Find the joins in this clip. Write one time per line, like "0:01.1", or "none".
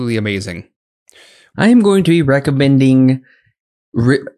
0:01.5